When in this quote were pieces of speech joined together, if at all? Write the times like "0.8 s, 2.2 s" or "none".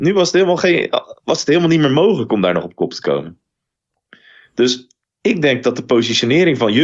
none